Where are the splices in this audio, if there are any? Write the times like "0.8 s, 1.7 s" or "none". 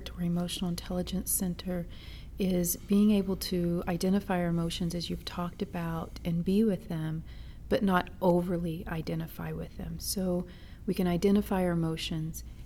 none